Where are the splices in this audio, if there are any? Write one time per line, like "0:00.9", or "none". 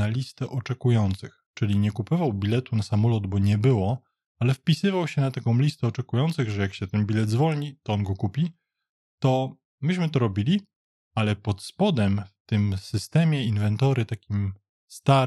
none